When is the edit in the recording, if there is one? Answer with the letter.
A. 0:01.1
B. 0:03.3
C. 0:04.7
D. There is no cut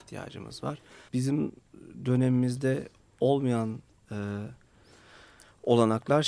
A